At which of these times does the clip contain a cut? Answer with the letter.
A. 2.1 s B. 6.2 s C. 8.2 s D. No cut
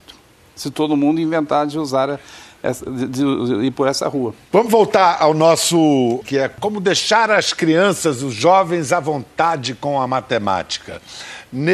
B